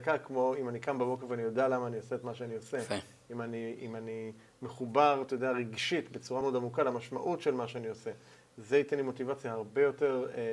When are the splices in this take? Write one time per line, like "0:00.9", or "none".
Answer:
0:06.4